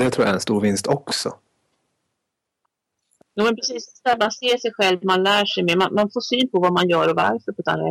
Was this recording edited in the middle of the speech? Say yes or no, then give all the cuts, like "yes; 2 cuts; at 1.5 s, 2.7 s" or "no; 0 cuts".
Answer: no; 0 cuts